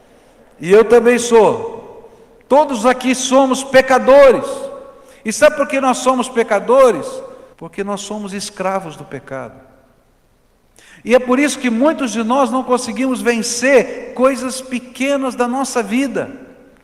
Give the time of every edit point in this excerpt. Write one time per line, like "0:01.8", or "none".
0:07.5